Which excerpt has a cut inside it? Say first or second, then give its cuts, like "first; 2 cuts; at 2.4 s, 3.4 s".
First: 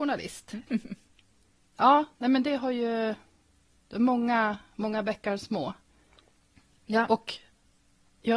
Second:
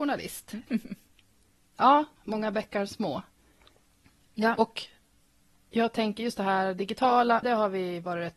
second; 2 cuts; at 2.2 s, 7.4 s